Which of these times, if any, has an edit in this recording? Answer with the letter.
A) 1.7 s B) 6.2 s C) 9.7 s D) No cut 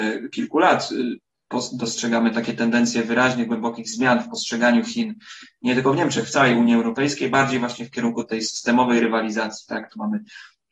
D